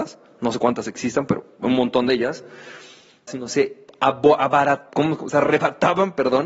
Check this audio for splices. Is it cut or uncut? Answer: cut